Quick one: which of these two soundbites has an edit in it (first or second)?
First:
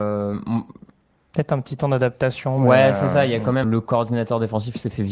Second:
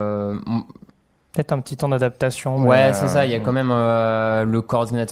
first